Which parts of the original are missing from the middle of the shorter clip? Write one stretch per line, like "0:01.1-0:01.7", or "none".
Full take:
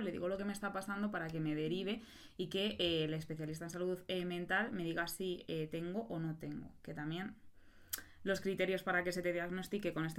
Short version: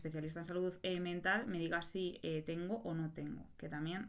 none